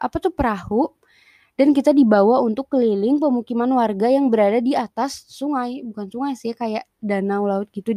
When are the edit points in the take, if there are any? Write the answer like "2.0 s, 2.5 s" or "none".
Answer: none